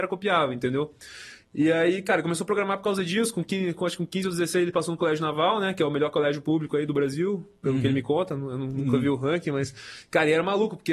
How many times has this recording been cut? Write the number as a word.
zero